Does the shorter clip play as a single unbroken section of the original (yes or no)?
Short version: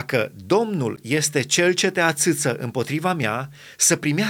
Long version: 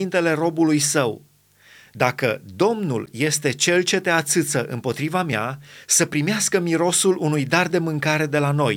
yes